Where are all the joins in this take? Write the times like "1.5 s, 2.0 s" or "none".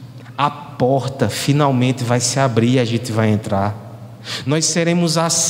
none